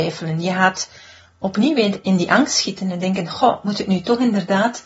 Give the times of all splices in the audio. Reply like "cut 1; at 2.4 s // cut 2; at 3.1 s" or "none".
none